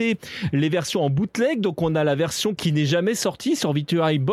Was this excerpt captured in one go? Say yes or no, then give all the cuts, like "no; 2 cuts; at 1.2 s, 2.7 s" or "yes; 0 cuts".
no; 1 cut; at 2.6 s